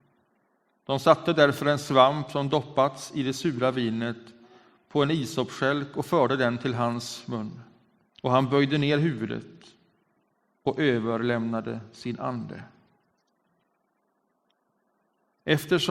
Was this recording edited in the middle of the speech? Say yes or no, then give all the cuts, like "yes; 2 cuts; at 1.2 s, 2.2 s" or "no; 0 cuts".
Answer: yes; 1 cut; at 8.1 s